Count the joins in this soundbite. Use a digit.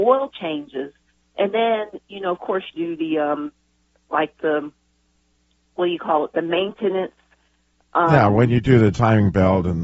1